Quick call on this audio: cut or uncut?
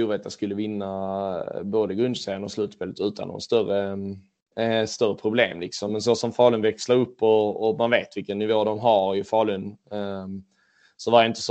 uncut